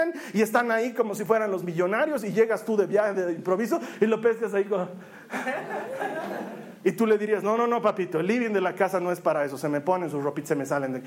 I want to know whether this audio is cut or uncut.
uncut